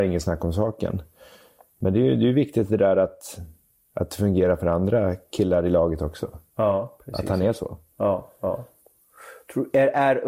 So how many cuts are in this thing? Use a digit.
0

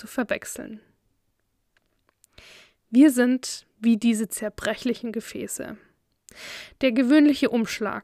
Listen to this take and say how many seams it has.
0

